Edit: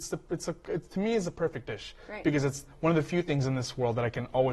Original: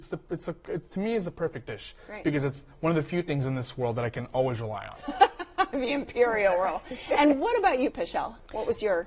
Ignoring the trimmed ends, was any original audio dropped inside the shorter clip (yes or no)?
no